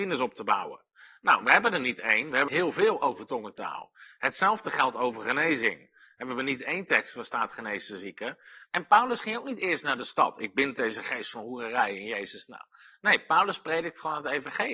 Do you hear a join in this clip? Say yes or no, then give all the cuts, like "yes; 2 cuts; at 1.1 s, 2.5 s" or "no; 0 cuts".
yes; 2 cuts; at 2.5 s, 8.6 s